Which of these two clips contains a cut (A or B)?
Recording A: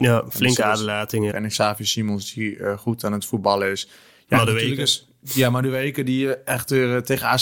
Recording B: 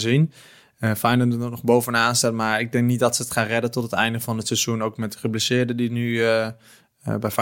A